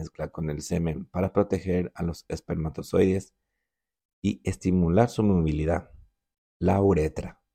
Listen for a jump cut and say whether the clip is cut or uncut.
uncut